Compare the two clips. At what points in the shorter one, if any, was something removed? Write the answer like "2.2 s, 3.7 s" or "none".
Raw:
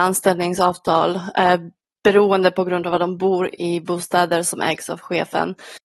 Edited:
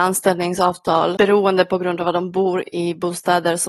1.1 s